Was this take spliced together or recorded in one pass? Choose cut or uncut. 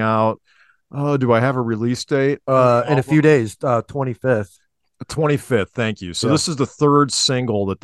uncut